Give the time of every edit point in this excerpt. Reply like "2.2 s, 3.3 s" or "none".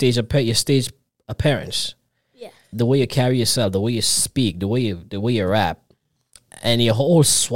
2.7 s